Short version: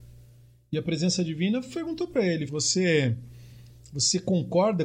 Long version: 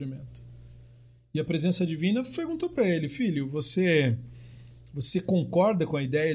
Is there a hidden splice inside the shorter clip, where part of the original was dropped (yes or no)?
yes